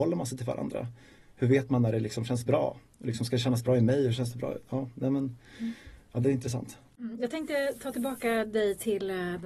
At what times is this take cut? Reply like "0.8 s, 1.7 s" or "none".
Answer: none